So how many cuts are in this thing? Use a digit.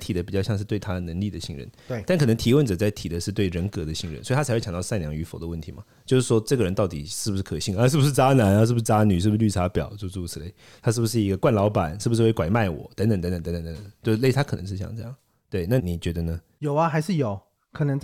1